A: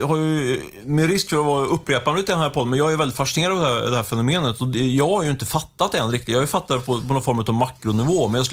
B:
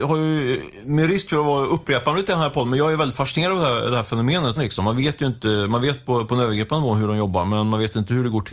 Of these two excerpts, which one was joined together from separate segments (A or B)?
B